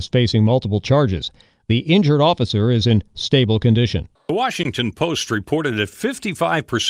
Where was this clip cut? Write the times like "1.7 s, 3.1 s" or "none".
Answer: 4.2 s